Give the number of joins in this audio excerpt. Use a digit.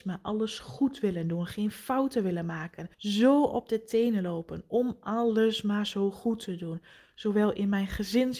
1